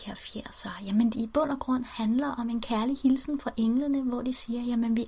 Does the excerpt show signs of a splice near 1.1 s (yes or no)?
yes